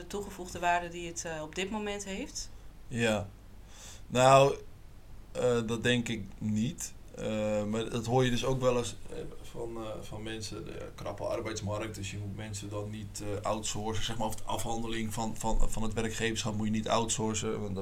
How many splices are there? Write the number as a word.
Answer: zero